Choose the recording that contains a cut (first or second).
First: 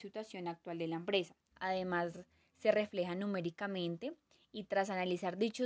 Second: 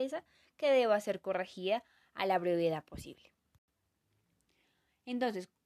first